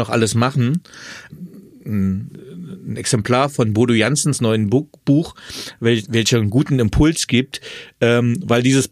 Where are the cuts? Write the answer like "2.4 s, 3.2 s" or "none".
1.3 s